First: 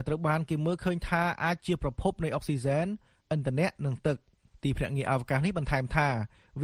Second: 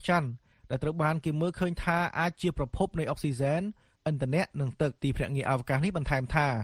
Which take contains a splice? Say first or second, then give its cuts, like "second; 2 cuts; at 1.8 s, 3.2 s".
second; 1 cut; at 5.0 s